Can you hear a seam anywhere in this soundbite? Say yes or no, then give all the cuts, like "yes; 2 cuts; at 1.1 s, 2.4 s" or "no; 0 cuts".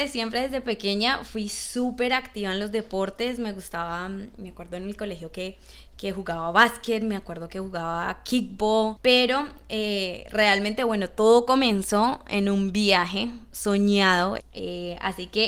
yes; 2 cuts; at 9.0 s, 14.4 s